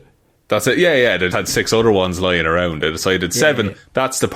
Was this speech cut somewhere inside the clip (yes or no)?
yes